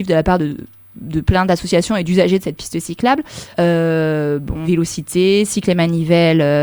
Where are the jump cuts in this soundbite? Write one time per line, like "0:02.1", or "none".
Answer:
0:03.5
0:04.6